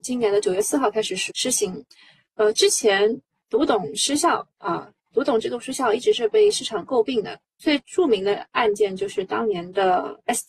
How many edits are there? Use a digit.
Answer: 1